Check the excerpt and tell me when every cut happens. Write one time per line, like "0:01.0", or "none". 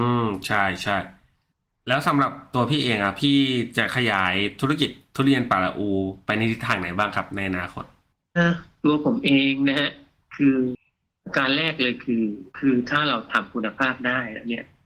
0:08.4
0:12.5

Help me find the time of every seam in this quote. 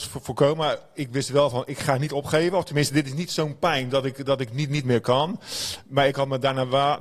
none

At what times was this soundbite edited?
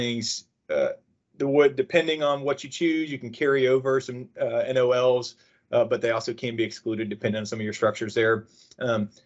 none

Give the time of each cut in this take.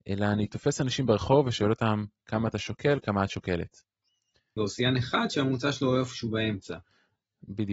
0:04.6

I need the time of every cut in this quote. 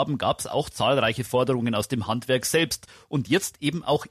none

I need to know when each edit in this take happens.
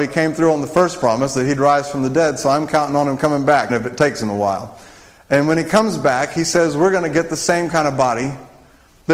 0:03.7

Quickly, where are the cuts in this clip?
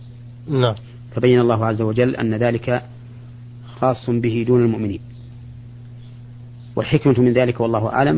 none

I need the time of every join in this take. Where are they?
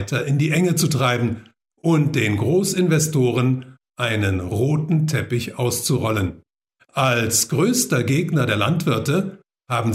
0:06.8

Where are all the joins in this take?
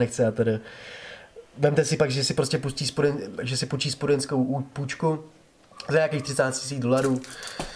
none

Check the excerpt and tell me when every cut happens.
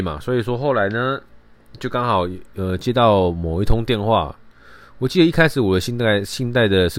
none

